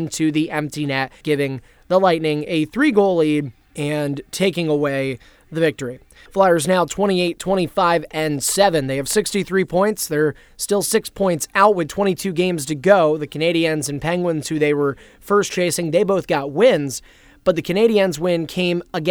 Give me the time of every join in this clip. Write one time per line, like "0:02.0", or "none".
0:01.2